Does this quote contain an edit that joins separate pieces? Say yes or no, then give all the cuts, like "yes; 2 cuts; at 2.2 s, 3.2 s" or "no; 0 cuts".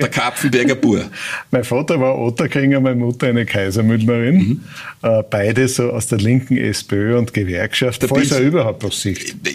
yes; 1 cut; at 8.0 s